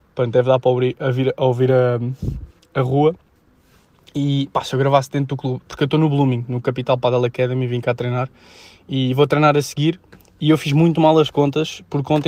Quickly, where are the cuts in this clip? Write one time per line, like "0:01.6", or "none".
none